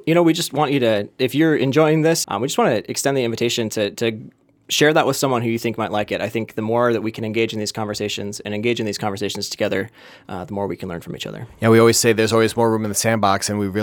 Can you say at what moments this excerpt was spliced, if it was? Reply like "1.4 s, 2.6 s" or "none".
2.2 s